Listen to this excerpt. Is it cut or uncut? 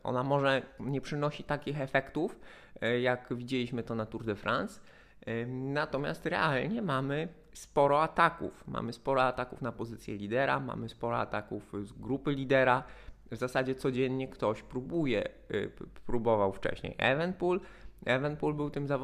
uncut